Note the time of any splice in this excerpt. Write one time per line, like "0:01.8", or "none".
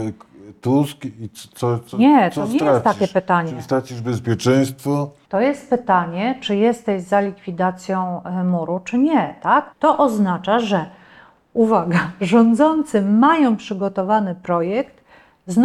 0:05.2
0:09.7